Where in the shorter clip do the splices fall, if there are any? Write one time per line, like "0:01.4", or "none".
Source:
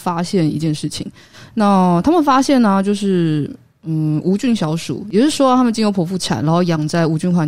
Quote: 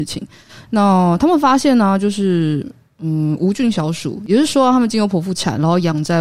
none